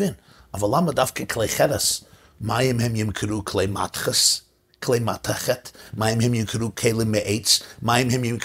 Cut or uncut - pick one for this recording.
uncut